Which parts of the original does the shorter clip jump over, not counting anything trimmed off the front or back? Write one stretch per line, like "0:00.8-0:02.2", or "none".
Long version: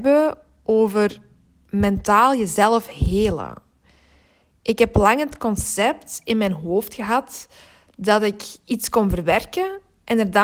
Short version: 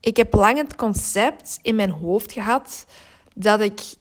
none